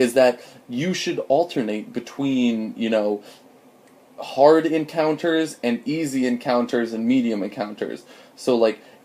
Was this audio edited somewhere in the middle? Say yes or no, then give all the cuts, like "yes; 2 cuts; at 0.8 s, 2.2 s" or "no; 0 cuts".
no; 0 cuts